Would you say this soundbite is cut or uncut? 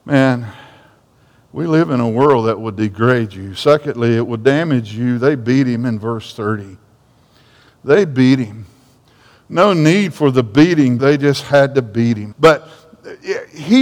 cut